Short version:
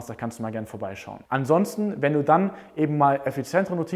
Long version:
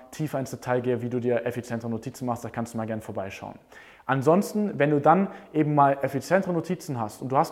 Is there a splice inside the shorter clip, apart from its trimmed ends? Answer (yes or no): yes